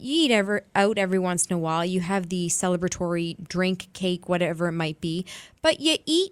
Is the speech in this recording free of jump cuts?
yes; 0 cuts

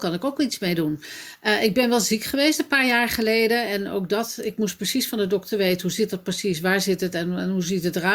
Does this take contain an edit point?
no; 0 cuts

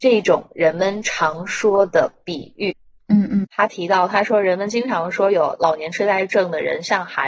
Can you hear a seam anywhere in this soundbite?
yes; 1 cut; at 3.4 s

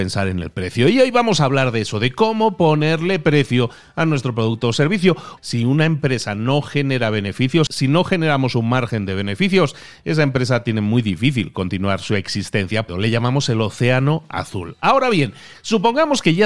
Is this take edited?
yes; 3 cuts; at 5.4 s, 7.7 s, 12.9 s

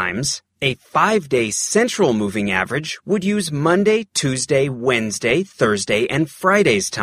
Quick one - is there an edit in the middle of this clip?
no; 0 cuts

